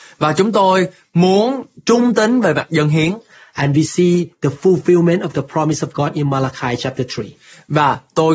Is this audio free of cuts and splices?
yes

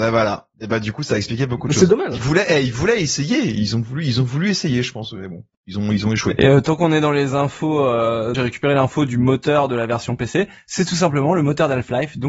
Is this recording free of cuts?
no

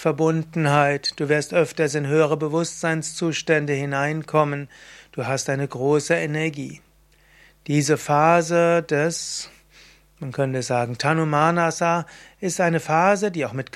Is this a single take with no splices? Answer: yes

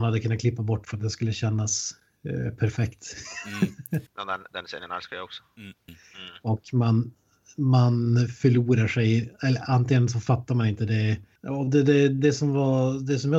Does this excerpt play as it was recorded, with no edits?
no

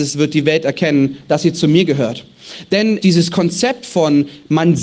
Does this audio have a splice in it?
yes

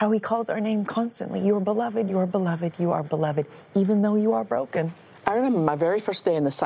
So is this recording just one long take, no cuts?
yes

